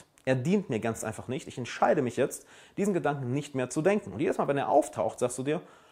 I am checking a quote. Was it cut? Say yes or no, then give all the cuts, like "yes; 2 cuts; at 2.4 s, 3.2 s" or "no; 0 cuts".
no; 0 cuts